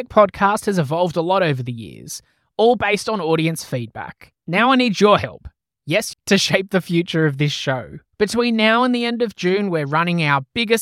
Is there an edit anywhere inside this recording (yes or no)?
yes